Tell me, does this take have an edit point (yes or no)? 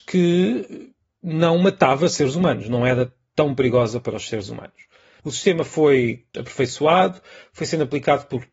yes